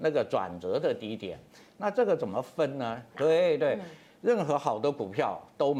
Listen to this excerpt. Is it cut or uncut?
cut